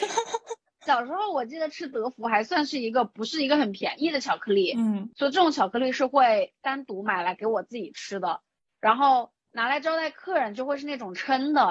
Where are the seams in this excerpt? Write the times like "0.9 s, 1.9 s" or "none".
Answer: none